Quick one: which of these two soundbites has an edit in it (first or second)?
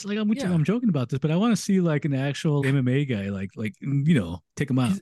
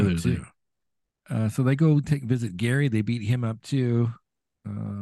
first